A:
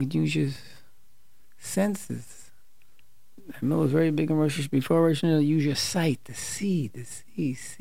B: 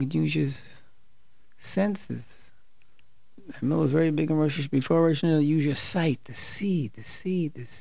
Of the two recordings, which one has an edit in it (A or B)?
A